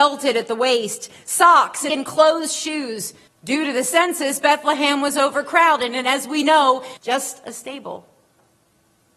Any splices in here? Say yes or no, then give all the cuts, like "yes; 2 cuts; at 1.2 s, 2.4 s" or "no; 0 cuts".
yes; 3 cuts; at 1.9 s, 3.3 s, 7.0 s